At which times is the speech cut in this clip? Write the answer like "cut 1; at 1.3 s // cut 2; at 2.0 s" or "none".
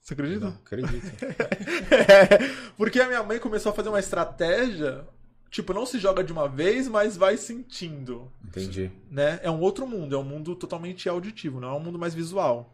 none